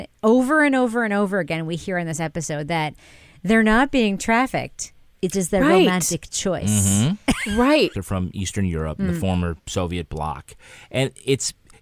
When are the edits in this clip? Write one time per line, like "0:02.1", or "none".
0:07.9